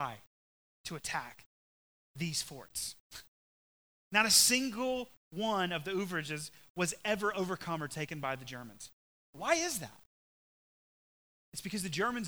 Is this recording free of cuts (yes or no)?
yes